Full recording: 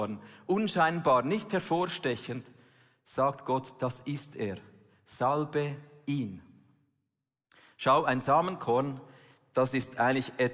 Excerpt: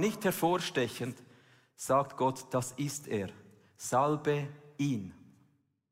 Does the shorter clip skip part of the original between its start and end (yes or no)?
no